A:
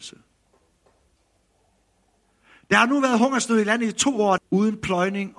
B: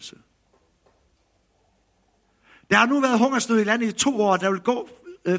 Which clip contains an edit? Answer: A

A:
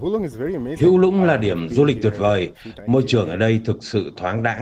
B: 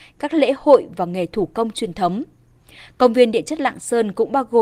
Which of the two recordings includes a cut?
A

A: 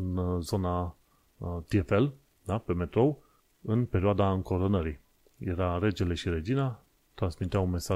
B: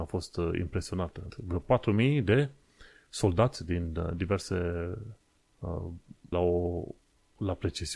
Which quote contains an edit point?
B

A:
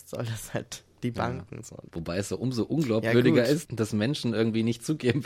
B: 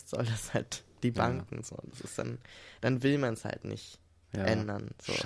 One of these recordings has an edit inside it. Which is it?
A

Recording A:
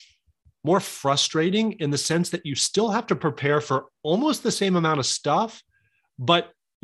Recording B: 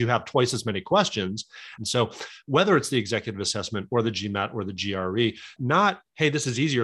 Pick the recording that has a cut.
B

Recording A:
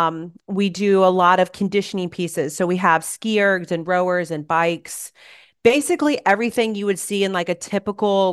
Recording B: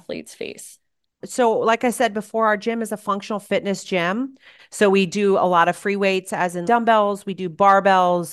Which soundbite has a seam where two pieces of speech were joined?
B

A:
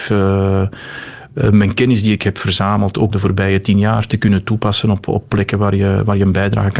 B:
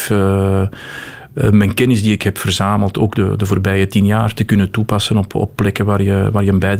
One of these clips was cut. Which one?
A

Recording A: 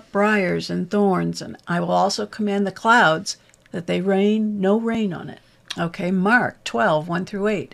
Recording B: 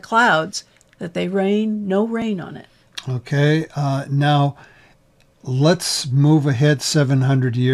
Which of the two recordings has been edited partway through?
A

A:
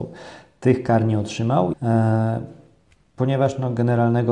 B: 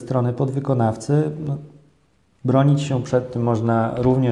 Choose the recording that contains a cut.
A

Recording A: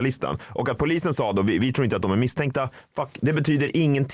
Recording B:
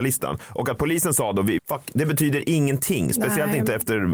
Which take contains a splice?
B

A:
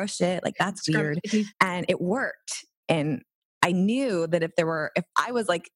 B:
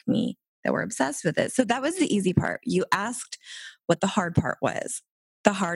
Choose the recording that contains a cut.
A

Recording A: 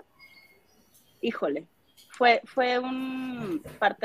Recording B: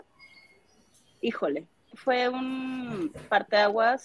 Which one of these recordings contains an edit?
B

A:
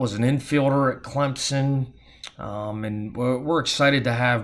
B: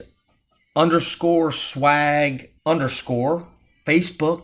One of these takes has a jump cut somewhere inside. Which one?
B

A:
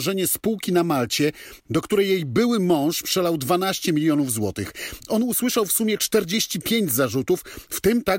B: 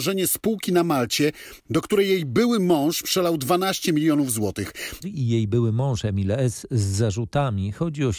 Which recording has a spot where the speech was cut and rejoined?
B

